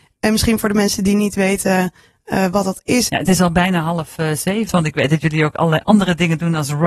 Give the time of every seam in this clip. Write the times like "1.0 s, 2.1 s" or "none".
3.1 s, 4.7 s